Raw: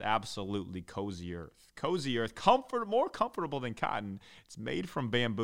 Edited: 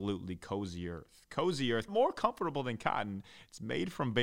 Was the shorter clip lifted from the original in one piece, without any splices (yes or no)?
no